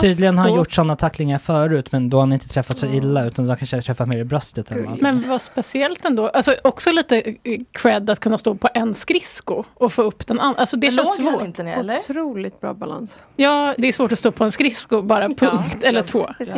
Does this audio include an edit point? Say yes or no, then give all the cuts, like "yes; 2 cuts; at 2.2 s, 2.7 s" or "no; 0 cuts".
yes; 2 cuts; at 5.2 s, 13.8 s